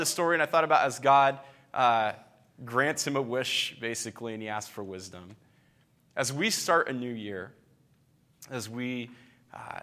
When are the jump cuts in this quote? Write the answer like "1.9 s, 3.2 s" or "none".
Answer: none